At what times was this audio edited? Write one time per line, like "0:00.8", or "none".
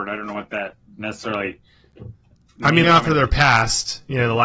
0:02.8